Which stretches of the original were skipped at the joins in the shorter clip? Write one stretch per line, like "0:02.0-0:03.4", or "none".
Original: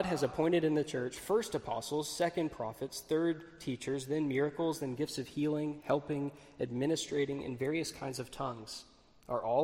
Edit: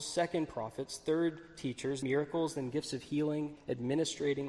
0:04.1-0:04.3
0:05.8-0:06.5